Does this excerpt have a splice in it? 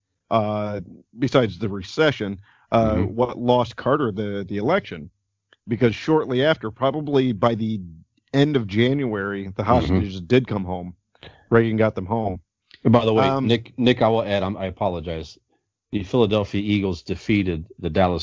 no; 0 cuts

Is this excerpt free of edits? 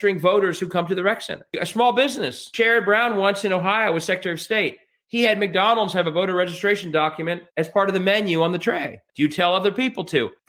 no; 2 cuts; at 7.5 s, 9.1 s

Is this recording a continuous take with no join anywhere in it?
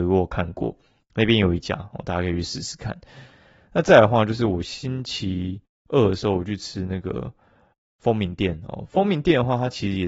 yes; 0 cuts

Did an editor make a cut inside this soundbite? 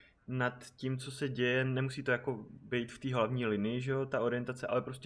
no; 0 cuts

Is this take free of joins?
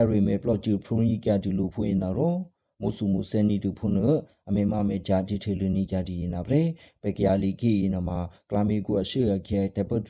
yes; 0 cuts

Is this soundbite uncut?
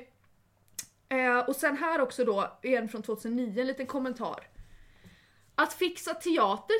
yes; 0 cuts

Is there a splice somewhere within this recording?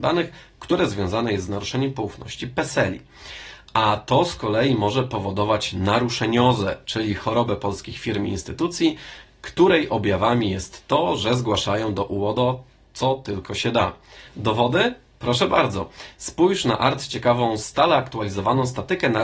no; 0 cuts

